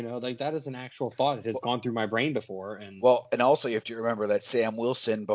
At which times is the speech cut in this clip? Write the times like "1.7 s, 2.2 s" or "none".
none